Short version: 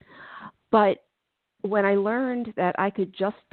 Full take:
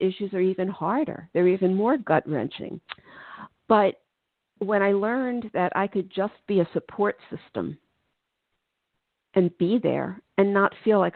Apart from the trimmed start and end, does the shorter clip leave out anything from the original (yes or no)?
no